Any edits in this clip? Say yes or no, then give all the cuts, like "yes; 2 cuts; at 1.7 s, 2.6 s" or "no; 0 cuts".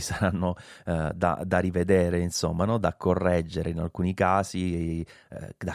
no; 0 cuts